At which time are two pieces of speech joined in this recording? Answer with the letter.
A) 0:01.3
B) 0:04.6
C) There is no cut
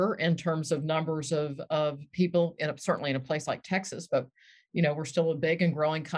C